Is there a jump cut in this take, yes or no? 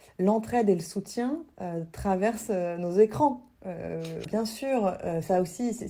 yes